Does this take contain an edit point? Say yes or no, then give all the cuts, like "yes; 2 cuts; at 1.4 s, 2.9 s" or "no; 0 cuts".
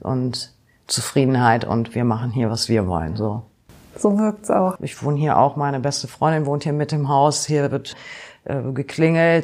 yes; 1 cut; at 4.8 s